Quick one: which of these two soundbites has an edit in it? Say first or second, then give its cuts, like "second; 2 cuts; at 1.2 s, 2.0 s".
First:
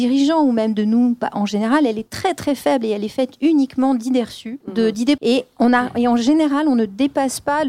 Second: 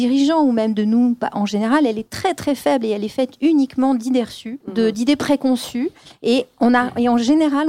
first; 1 cut; at 5.2 s